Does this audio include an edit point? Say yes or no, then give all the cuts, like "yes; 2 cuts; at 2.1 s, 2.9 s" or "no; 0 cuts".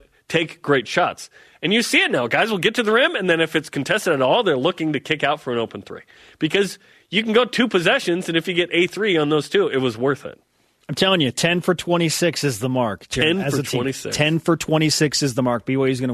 no; 0 cuts